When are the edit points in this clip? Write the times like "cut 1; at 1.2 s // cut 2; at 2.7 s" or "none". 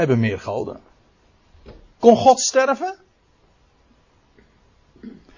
cut 1; at 1.9 s